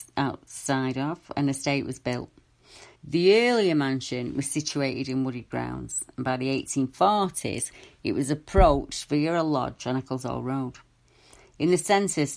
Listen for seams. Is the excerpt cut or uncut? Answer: cut